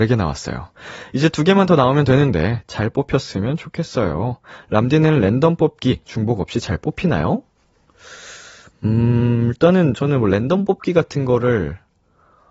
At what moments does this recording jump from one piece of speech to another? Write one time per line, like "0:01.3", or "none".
none